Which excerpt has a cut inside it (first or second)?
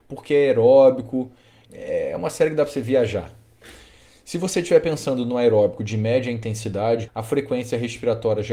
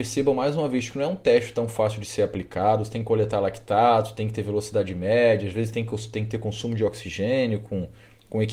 first